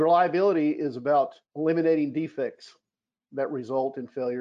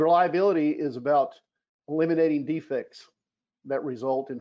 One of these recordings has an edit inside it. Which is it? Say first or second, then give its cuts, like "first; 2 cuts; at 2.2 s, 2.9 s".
first; 1 cut; at 1.4 s